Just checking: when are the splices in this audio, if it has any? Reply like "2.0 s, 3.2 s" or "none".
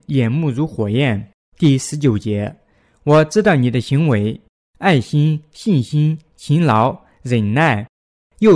1.3 s